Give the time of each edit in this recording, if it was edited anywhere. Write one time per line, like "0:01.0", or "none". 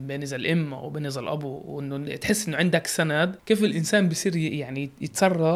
0:03.4